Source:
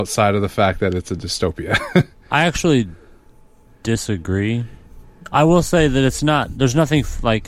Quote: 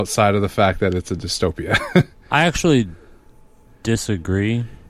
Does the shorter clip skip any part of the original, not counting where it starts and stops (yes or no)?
no